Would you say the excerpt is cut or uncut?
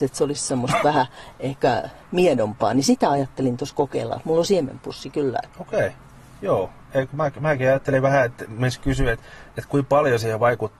cut